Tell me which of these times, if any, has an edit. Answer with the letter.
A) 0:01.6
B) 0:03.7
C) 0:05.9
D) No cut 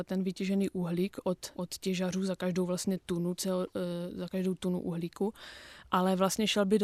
A